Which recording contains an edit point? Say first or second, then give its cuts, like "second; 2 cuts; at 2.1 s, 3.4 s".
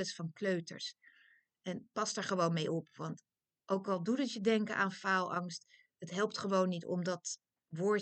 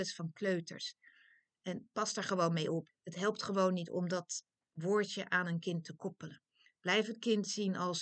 second; 1 cut; at 2.9 s